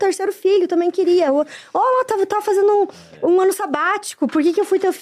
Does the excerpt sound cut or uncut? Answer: uncut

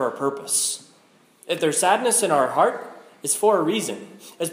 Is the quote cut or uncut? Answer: uncut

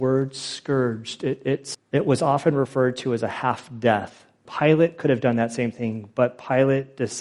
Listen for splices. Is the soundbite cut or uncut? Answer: cut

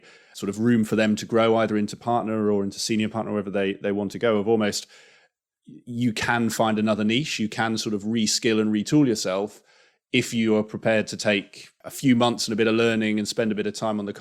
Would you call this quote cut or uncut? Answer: uncut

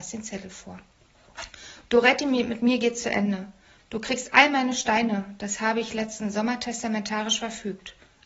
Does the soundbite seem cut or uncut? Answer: uncut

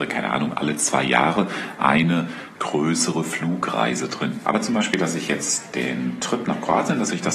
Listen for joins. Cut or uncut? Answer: cut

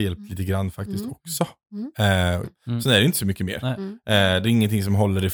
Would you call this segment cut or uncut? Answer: cut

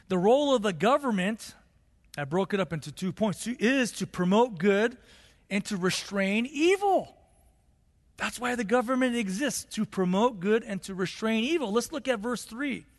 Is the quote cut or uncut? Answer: uncut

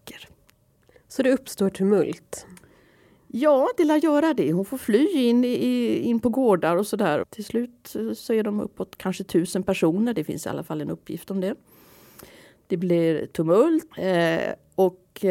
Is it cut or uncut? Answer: cut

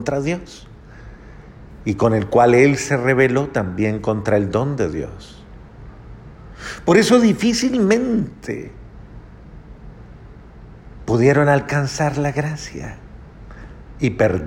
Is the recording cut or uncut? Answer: uncut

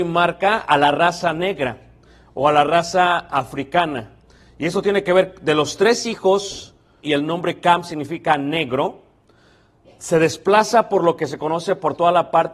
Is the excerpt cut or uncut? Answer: cut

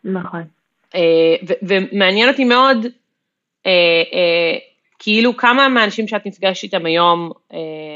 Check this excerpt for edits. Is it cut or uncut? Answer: uncut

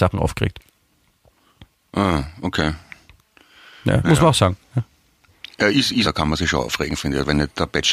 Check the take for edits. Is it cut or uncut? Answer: cut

